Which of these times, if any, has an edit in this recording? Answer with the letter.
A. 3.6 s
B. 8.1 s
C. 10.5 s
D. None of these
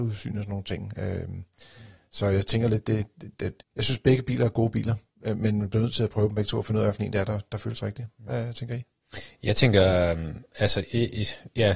A